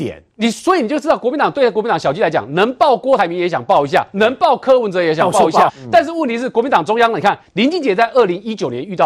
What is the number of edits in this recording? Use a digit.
2